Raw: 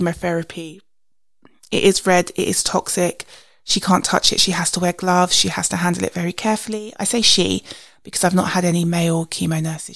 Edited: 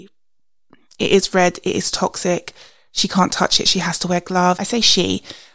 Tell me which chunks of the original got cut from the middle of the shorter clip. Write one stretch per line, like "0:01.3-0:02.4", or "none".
0:05.3-0:07.0